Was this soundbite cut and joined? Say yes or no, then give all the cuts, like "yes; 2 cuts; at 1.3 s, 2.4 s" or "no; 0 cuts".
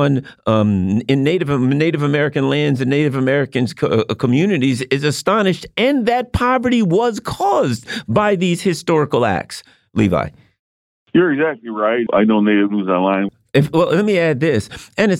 yes; 2 cuts; at 12.1 s, 13.3 s